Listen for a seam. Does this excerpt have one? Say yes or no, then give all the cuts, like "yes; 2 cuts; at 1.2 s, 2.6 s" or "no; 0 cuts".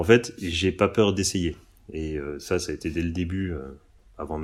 no; 0 cuts